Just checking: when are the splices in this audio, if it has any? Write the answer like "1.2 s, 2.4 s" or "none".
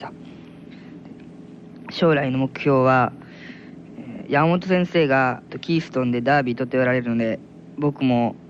5.5 s